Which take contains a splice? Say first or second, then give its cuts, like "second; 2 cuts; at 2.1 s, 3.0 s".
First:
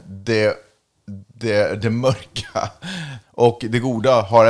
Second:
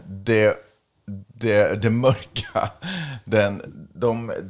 first; 1 cut; at 3.2 s